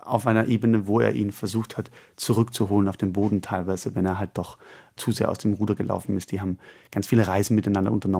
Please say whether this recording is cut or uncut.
uncut